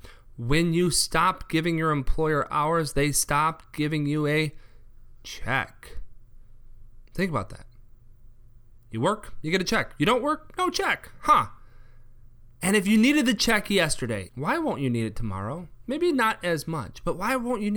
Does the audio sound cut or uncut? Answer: cut